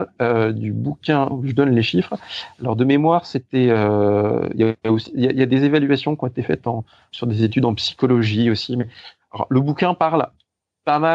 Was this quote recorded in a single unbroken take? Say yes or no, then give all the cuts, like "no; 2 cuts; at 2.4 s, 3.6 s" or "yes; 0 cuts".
yes; 0 cuts